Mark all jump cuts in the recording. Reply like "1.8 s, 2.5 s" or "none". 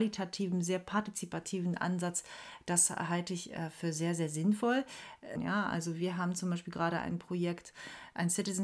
5.4 s